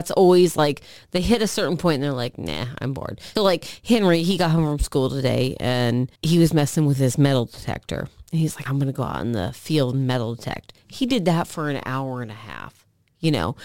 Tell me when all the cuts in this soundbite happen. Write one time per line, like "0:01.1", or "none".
0:03.4
0:06.1
0:08.7

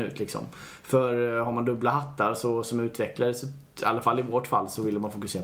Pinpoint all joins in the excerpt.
0:03.7

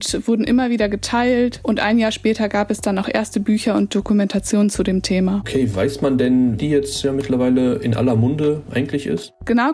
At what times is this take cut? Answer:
0:06.6

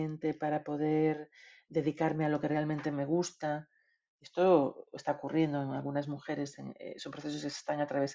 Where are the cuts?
none

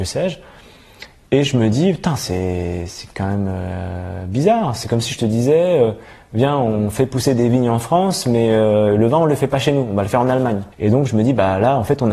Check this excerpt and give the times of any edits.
0:10.7

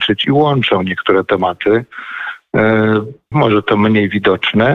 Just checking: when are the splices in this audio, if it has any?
0:03.3

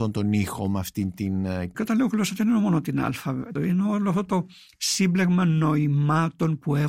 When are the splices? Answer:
0:01.7
0:03.6

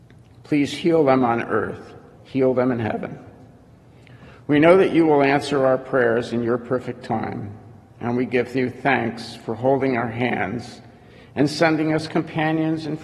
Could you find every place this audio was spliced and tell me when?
0:02.1

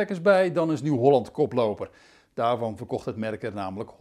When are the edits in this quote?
none

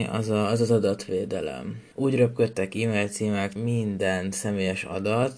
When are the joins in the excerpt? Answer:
0:01.9
0:03.6

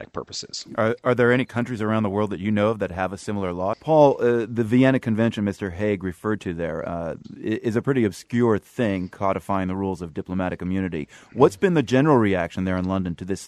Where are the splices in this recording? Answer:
0:03.7

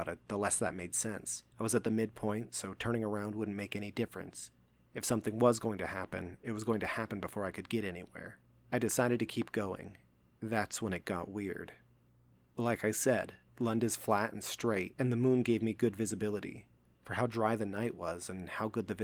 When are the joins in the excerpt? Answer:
0:01.5
0:16.9

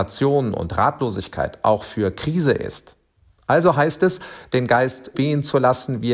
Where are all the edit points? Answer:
0:05.1

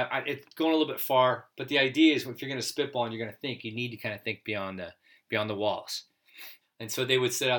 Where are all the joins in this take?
0:06.6

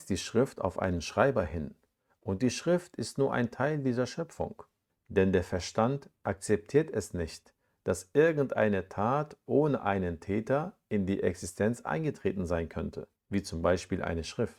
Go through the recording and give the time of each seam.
0:04.9
0:13.2

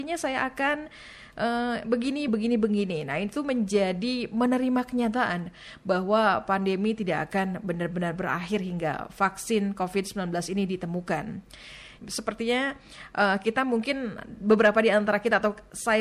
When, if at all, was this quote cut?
0:02.3
0:12.0

